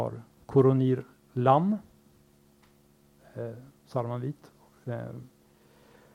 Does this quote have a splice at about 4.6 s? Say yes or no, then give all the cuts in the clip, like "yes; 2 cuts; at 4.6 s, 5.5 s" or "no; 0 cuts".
no; 0 cuts